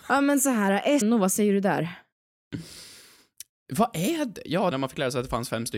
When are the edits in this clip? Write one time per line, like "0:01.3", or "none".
0:01.0
0:04.7